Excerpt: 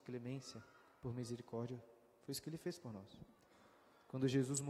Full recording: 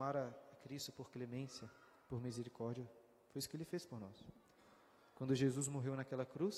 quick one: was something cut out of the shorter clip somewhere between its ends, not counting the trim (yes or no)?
no